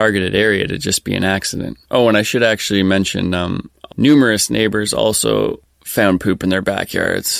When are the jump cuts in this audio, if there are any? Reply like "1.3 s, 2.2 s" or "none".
1.8 s, 3.9 s